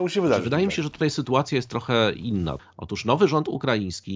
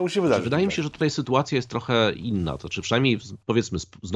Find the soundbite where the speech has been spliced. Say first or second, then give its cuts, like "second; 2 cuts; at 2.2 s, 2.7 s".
first; 1 cut; at 2.6 s